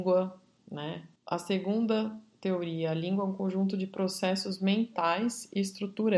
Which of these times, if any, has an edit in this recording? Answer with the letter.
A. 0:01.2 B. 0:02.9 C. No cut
A